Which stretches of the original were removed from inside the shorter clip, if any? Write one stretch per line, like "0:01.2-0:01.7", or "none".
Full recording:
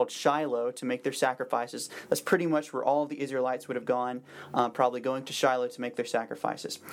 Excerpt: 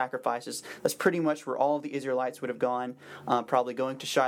none